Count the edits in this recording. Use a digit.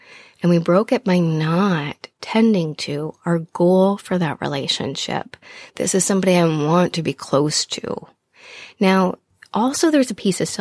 1